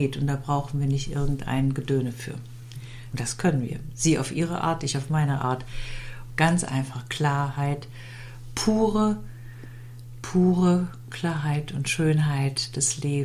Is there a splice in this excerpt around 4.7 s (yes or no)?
no